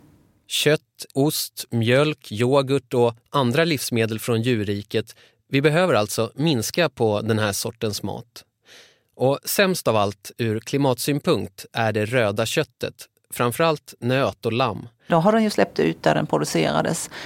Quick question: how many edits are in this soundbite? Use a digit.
2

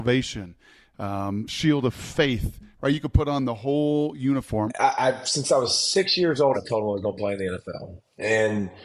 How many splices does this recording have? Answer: 2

